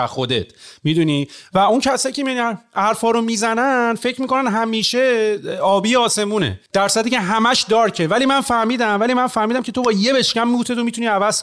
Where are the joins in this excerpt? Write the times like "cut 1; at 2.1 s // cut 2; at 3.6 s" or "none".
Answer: cut 1; at 6.7 s